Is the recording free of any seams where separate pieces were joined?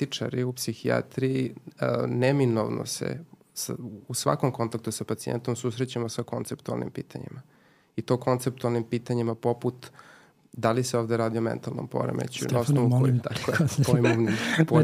no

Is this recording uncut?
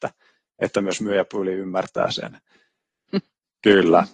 no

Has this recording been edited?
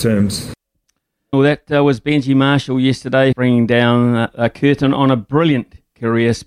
yes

